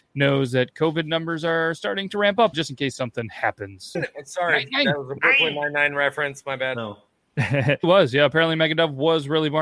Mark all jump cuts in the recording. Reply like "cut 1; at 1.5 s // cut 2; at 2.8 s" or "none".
cut 1; at 2.5 s // cut 2; at 3.9 s // cut 3; at 7.8 s